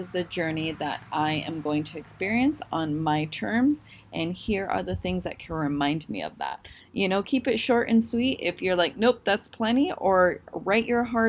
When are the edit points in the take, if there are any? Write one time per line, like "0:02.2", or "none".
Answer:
0:06.8